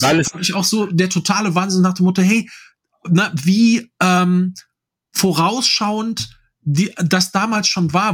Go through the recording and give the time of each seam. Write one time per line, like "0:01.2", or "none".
none